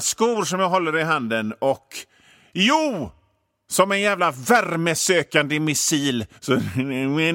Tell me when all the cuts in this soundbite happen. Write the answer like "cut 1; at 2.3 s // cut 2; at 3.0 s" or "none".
cut 1; at 6.4 s